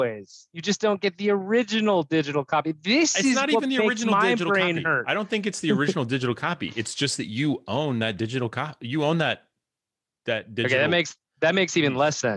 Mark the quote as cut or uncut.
uncut